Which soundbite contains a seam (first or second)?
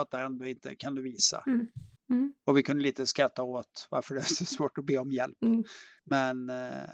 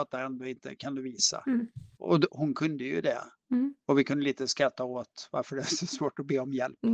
first